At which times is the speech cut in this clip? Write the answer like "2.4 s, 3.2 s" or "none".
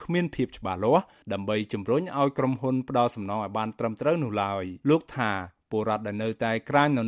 4.8 s